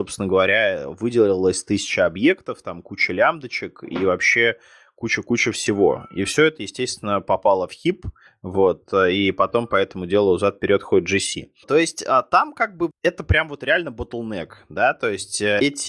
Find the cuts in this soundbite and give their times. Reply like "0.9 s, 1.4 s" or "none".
11.6 s, 12.9 s